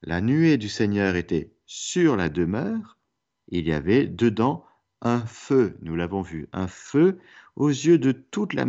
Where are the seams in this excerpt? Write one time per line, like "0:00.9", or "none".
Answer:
0:03.4